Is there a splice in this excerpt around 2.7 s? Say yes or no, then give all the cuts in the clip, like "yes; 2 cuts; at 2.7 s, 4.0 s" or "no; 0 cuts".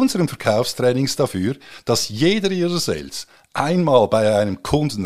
no; 0 cuts